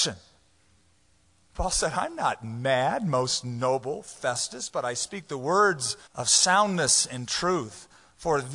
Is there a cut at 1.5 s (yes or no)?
yes